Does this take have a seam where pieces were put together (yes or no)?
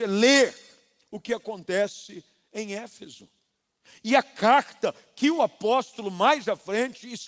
no